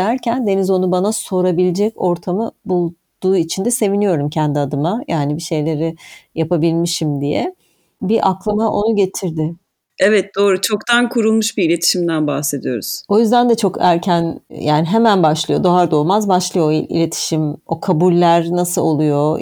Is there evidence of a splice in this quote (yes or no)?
no